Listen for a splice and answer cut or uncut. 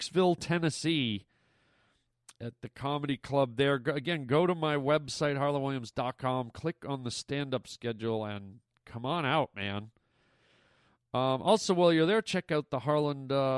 uncut